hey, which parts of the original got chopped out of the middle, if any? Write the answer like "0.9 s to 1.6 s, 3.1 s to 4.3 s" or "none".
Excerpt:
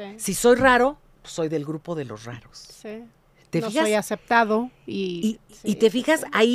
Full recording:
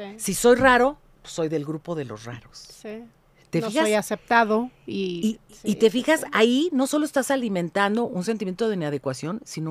none